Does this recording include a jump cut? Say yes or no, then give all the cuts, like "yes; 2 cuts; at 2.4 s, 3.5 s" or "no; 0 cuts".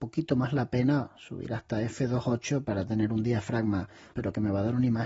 yes; 1 cut; at 4.1 s